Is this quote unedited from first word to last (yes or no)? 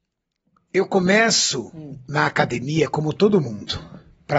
yes